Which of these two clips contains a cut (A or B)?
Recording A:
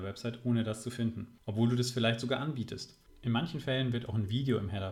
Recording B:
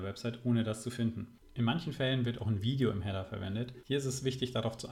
B